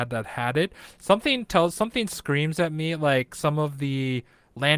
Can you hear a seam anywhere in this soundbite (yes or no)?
no